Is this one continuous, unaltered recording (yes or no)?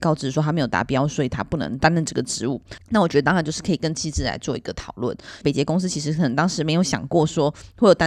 no